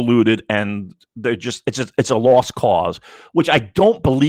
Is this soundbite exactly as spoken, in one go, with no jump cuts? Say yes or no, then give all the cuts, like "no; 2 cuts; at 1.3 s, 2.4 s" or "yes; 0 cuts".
yes; 0 cuts